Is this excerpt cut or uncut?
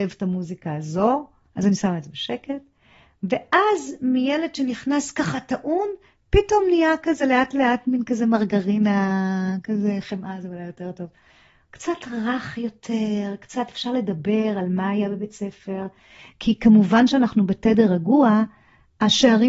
uncut